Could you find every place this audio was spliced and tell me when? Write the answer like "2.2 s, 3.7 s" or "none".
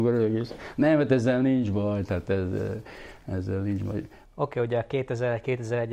4.2 s